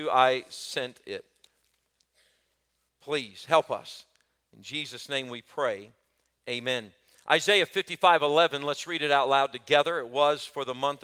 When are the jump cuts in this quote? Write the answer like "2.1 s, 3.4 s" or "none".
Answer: 2.9 s